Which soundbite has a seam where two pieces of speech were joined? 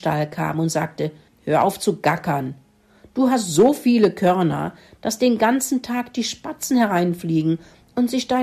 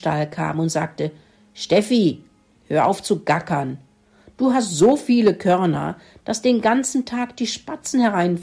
first; 1 cut; at 1.3 s

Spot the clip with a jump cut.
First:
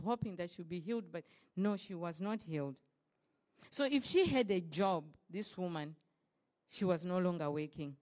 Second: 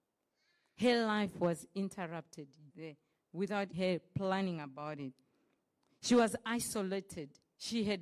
second; 2 cuts; at 2.7 s, 3.7 s

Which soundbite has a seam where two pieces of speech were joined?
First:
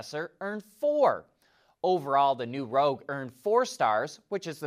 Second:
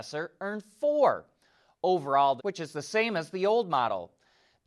second; 1 cut; at 2.4 s

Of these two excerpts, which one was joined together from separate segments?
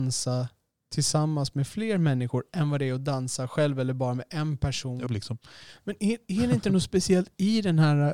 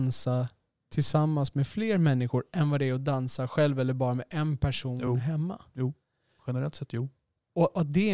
first; 1 cut; at 5.1 s

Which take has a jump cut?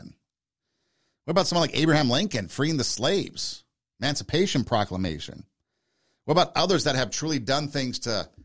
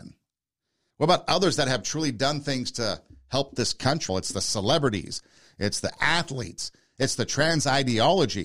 second; 3 cuts; at 0.9 s, 4.1 s, 6.9 s

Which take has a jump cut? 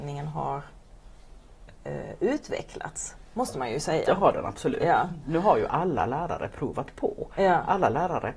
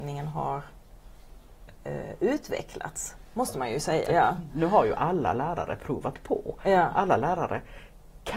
second; 1 cut; at 4.1 s

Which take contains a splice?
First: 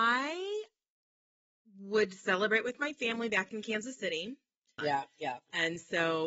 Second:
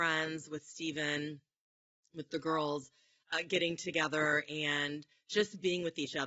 first; 1 cut; at 4.8 s

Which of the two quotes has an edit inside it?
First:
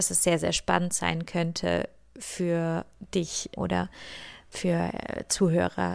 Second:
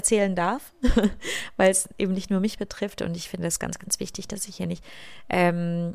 first; 1 cut; at 3.6 s

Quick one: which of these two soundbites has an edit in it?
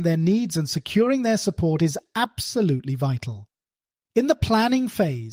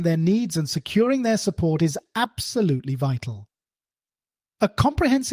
first; 1 cut; at 4.0 s

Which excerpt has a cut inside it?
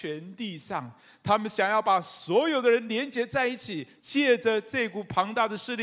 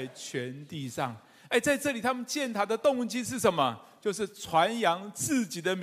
first; 1 cut; at 4.0 s

